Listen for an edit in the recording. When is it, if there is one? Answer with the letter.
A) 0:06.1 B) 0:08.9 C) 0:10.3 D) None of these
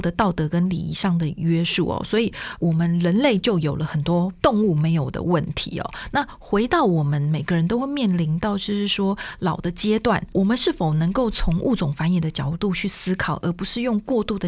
D